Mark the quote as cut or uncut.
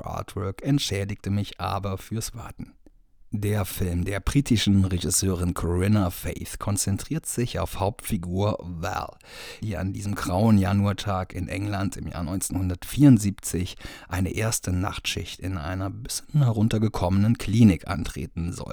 cut